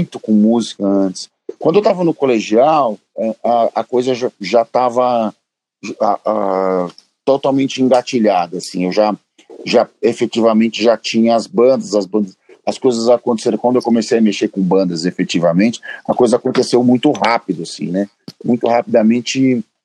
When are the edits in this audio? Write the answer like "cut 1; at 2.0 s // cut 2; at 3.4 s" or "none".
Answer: none